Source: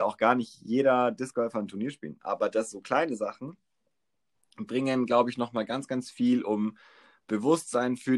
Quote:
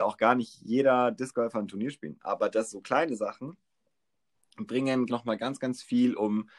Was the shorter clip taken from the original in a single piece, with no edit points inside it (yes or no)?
no